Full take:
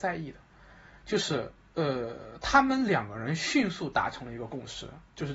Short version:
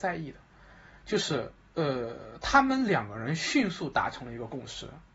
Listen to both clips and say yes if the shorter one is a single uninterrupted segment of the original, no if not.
yes